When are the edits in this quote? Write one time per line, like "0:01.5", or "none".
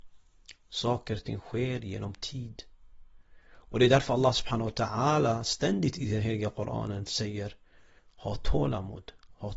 none